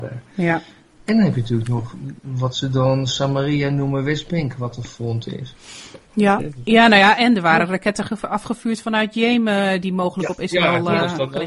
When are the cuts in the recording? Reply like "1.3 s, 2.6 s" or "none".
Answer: 1.1 s, 6.4 s